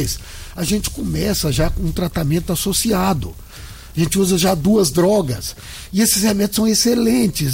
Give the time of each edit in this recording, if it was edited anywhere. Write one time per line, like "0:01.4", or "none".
none